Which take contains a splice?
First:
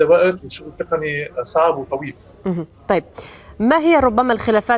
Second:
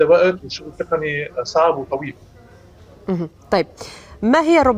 first; 1 cut; at 2.2 s

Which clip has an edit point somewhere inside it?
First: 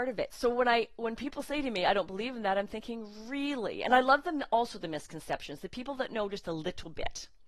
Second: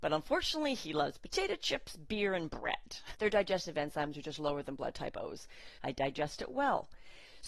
second; 2 cuts; at 3.1 s, 5.8 s

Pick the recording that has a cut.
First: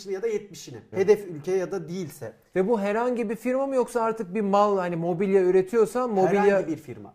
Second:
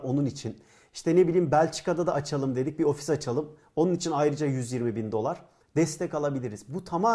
first; 1 cut; at 0.9 s

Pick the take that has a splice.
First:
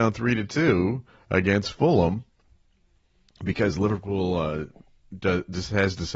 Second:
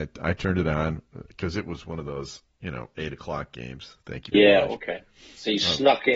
second; 1 cut; at 4.3 s

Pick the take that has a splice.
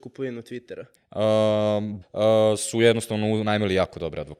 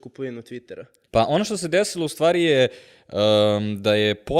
first; 2 cuts; at 1.0 s, 2.0 s

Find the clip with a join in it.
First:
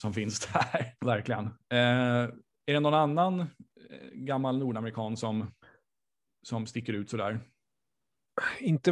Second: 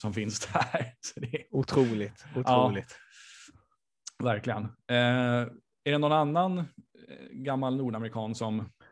first; 1 cut; at 1.0 s

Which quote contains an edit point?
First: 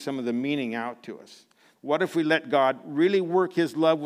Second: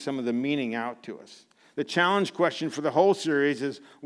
first; 1 cut; at 1.8 s

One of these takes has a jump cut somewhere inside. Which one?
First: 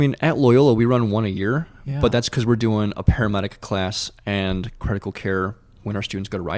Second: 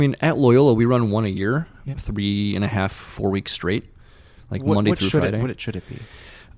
second; 1 cut; at 1.9 s

